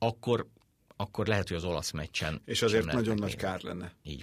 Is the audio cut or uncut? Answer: uncut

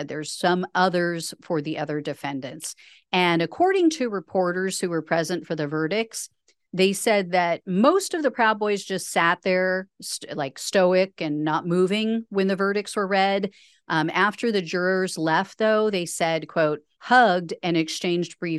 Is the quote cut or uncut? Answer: cut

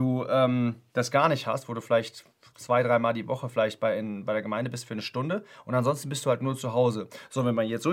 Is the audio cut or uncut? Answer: uncut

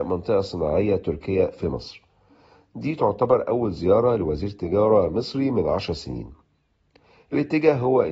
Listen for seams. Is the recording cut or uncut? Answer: uncut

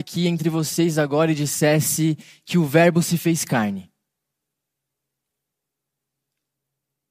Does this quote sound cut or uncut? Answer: uncut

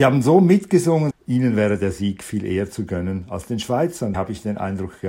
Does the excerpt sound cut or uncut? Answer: cut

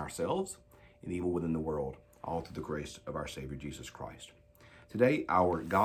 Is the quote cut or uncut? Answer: uncut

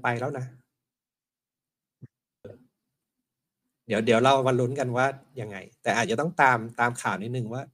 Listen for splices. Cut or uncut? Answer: cut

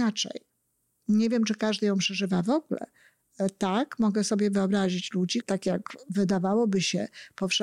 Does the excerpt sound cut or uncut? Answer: cut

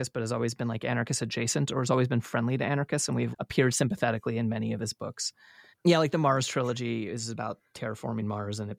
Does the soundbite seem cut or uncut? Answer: cut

